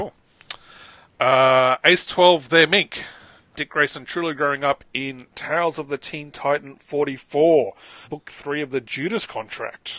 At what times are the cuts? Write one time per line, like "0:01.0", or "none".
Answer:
0:03.5
0:08.0